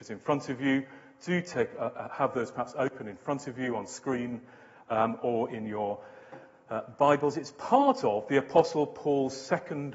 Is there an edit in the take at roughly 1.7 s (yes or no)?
no